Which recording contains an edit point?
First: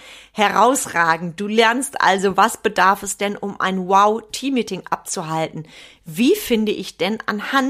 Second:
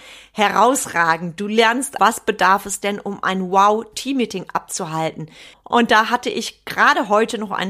second; 2 cuts; at 2.0 s, 5.5 s

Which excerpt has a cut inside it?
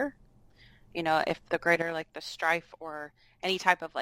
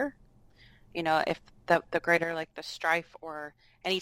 first; 1 cut; at 1.5 s

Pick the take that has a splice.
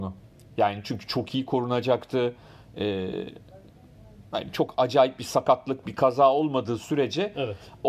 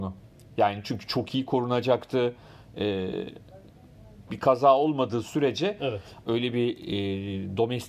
second; 2 cuts; at 4.3 s, 6.2 s

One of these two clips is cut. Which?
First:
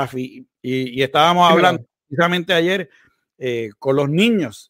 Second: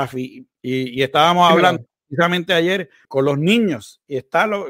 second; 1 cut; at 3.0 s

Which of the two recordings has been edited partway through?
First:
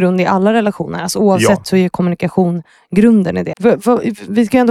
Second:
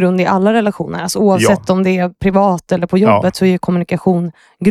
first; 2 cuts; at 1.6 s, 3.5 s

